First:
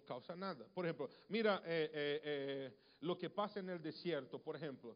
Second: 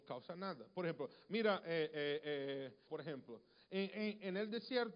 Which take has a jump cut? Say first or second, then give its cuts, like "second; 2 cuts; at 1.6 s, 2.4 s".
second; 1 cut; at 2.9 s